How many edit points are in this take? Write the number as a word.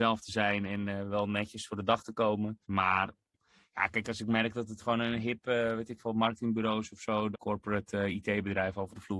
two